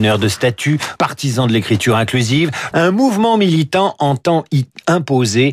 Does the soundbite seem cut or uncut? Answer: cut